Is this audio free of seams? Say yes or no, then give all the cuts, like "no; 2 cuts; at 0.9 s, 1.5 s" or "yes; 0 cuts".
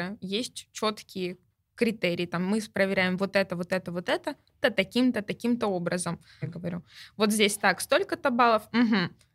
no; 2 cuts; at 4.6 s, 6.4 s